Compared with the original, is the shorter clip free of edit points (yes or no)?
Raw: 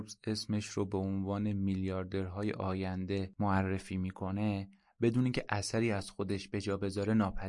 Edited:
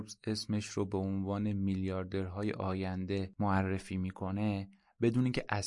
yes